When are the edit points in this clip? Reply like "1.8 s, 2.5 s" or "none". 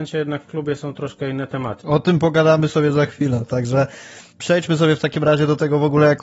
3.5 s